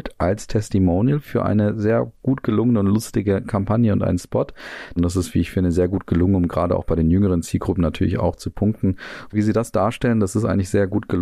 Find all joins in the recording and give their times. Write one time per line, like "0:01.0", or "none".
0:05.0
0:09.3